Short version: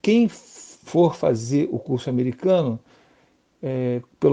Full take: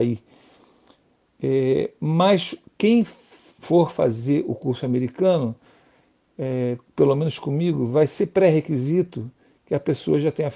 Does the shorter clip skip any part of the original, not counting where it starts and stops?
no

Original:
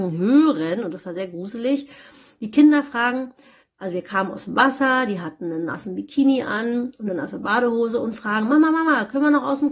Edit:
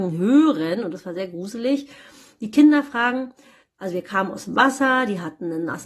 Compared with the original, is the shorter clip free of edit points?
yes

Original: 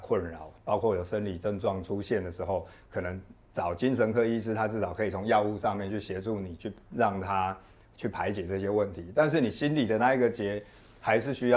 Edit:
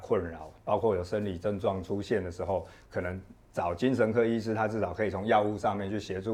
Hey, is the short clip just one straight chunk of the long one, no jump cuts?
yes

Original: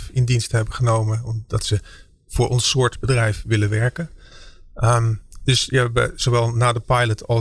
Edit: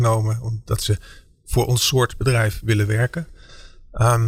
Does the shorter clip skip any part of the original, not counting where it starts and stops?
no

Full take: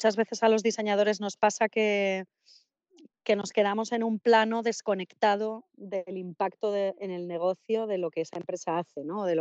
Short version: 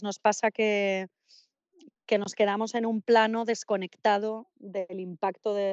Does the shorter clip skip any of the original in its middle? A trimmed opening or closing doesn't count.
no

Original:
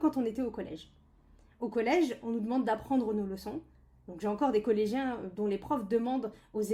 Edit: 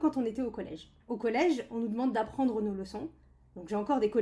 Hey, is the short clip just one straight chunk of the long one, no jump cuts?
no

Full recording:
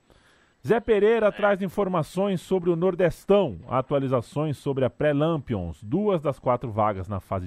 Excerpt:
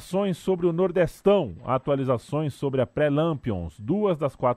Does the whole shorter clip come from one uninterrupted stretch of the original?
yes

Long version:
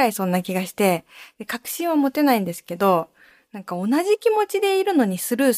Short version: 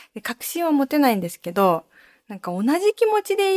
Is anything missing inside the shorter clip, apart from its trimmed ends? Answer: no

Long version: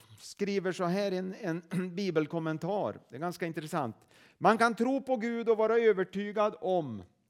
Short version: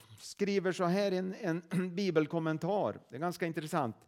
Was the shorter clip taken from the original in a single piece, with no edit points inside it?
yes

